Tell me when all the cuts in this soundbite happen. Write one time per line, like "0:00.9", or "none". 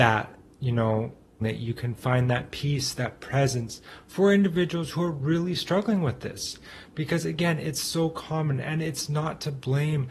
0:01.4